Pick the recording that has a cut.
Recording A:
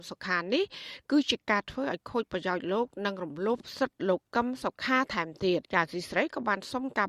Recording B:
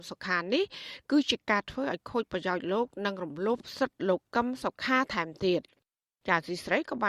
A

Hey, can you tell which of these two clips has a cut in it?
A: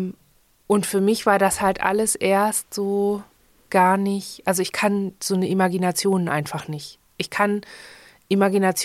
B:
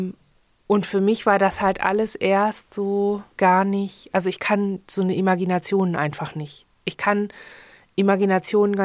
B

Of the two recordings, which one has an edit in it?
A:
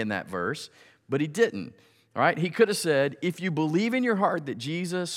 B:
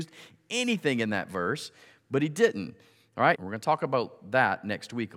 B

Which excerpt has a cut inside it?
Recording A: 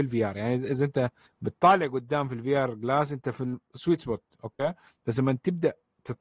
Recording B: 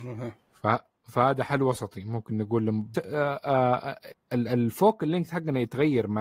B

